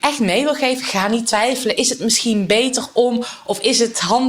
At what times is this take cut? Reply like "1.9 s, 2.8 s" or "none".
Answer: none